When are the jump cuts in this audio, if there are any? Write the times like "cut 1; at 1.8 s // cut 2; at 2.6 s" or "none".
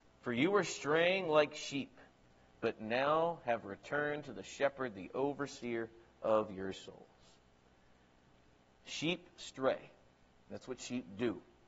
none